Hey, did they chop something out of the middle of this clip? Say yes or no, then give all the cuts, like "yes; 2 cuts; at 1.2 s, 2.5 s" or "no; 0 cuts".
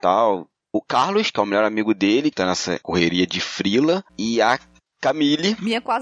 yes; 1 cut; at 2.3 s